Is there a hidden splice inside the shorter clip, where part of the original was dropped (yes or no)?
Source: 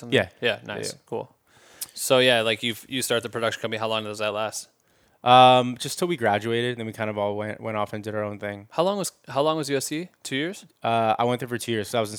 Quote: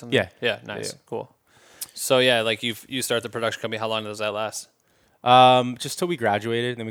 no